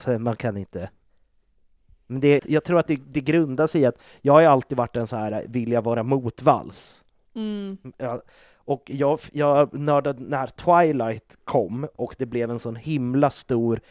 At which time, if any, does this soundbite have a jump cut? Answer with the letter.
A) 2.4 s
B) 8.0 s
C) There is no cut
A